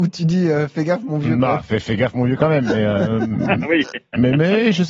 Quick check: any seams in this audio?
no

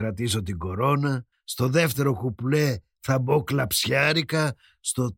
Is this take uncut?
no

